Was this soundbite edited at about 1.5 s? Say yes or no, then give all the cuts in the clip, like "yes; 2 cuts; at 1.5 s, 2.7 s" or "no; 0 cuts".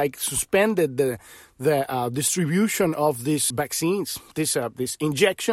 no; 1 cut; at 3.5 s